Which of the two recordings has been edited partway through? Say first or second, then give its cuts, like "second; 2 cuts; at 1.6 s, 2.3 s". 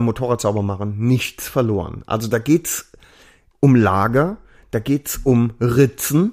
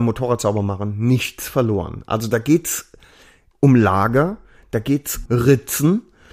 second; 1 cut; at 5.3 s